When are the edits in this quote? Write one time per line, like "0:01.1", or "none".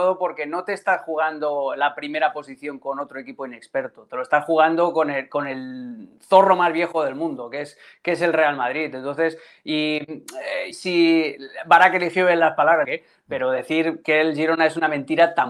0:10.7
0:12.8

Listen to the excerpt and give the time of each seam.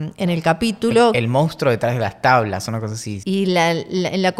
0:03.2

